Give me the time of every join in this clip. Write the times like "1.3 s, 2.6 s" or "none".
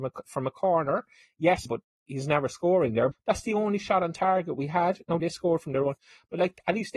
1.7 s, 3.1 s, 5.2 s